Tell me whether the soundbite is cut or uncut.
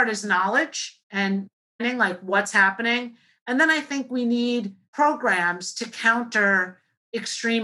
uncut